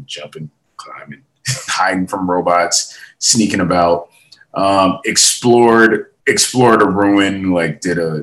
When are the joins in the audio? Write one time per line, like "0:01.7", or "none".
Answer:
0:01.7
0:06.2